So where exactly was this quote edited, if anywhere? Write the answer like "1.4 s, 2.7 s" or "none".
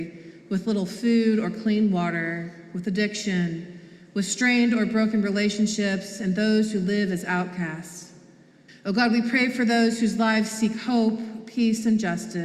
8.7 s